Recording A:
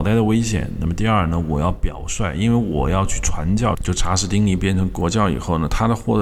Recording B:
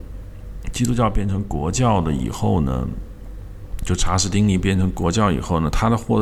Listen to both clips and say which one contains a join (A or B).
A